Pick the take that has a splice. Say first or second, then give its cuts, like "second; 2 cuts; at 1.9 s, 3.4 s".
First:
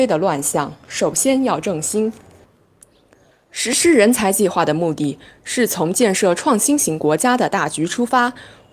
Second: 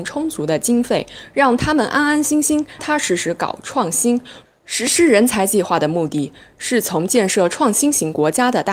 second; 2 cuts; at 2.8 s, 4.4 s